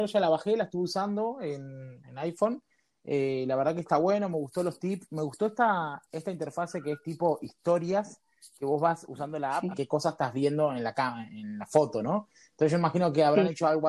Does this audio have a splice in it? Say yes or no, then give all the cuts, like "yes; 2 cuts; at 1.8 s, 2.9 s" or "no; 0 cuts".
yes; 1 cut; at 9.7 s